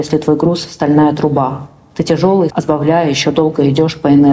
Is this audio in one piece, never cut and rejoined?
no; 1 cut; at 2.5 s

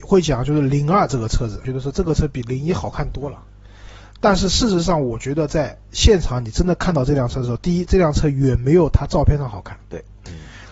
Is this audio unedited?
no; 1 cut; at 1.6 s

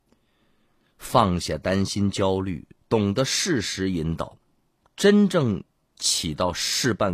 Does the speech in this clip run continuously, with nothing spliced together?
yes; 0 cuts

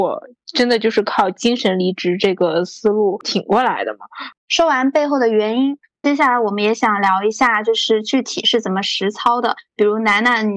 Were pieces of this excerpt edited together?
yes; 1 cut; at 4.3 s

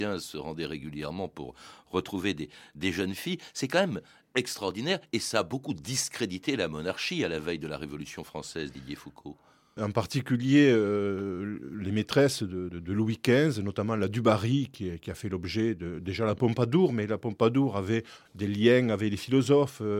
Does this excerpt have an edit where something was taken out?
yes; 3 cuts; at 9.8 s, 12.7 s, 18.3 s

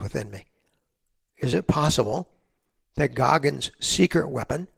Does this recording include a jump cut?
no; 0 cuts

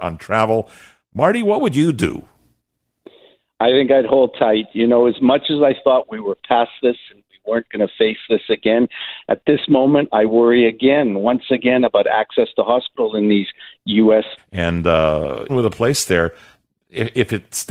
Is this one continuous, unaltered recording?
no; 2 cuts; at 14.4 s, 15.5 s

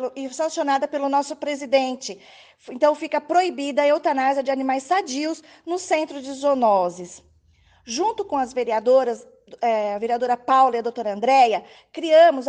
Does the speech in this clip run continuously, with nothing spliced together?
yes; 0 cuts

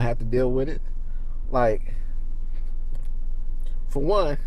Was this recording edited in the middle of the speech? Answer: yes; 1 cut; at 1.4 s

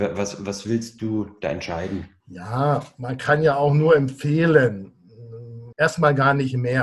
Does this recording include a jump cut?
yes; 2 cuts; at 2.2 s, 5.7 s

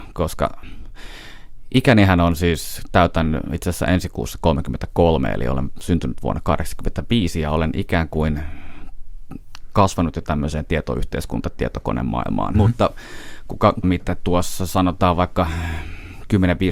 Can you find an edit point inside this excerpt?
yes; 2 cuts; at 12.5 s, 13.8 s

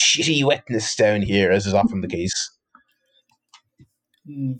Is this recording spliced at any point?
no; 0 cuts

